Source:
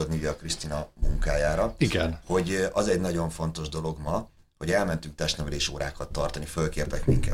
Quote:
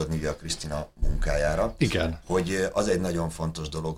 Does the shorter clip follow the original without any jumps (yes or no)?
yes